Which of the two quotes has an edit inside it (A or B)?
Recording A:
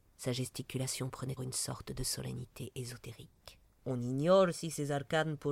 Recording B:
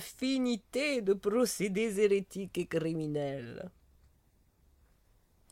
A